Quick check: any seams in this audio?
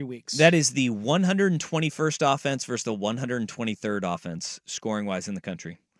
no; 0 cuts

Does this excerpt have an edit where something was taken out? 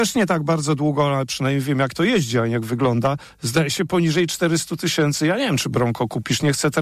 no; 0 cuts

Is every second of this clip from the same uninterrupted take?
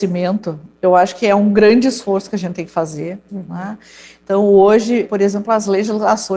no; 1 cut; at 3.3 s

